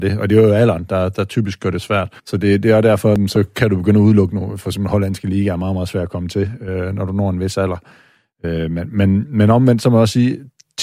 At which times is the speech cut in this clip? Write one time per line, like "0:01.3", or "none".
0:02.2